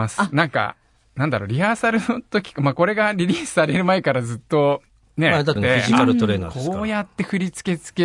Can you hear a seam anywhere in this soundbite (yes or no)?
yes